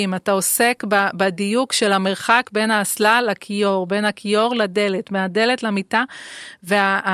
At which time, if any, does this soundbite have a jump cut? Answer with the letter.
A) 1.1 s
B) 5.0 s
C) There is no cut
C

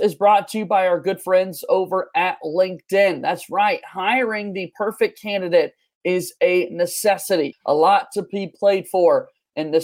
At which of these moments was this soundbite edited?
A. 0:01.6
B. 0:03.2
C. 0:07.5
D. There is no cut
C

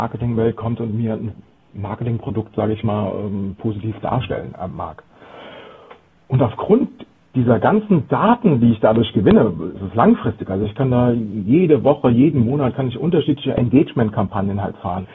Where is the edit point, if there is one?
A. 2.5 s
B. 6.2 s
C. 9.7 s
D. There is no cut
C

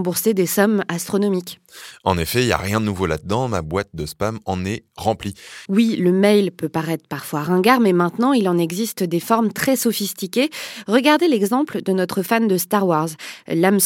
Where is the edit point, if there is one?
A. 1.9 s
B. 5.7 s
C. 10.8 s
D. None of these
B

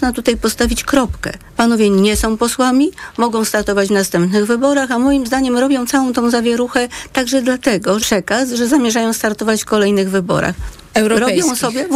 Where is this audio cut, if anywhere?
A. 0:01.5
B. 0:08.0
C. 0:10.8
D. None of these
B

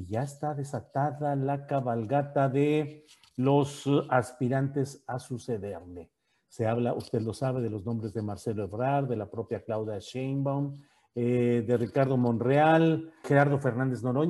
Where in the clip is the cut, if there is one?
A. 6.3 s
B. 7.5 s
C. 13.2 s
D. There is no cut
C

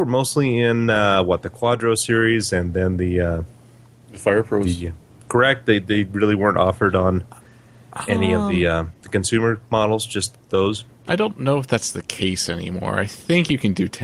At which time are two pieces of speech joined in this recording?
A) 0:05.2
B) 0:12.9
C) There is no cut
A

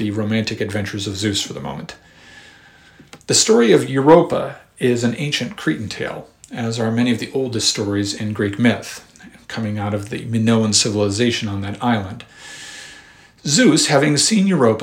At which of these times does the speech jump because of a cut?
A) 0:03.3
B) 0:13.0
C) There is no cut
C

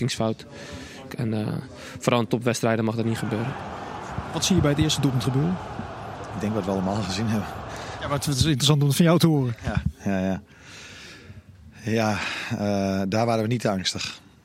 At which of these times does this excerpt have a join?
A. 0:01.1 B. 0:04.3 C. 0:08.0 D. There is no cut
A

